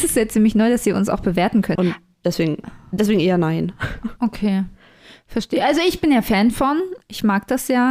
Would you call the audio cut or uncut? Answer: cut